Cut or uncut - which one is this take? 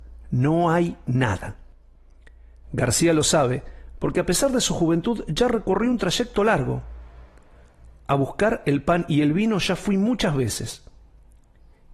uncut